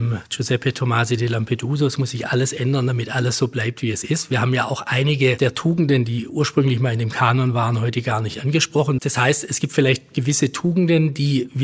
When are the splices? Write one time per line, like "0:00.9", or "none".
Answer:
0:09.0